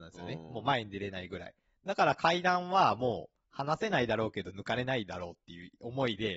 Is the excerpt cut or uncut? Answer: uncut